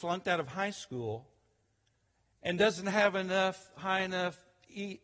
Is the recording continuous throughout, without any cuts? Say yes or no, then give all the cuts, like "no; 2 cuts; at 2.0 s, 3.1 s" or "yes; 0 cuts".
yes; 0 cuts